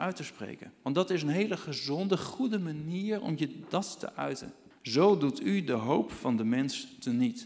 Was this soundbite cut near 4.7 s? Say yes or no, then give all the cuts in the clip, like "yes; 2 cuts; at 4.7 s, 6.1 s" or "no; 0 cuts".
yes; 1 cut; at 4.7 s